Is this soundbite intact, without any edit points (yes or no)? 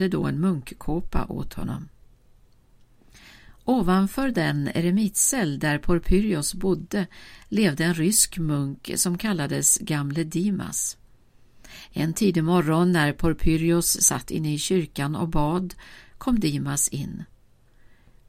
no